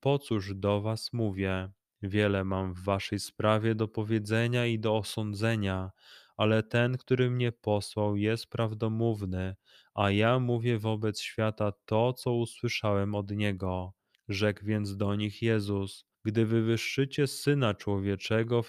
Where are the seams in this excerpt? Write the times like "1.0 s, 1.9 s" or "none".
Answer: 14.1 s, 16.1 s